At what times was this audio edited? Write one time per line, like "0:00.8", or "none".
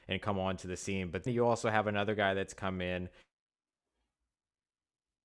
0:01.3